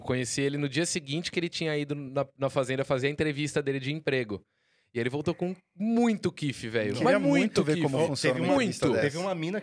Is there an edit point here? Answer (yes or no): no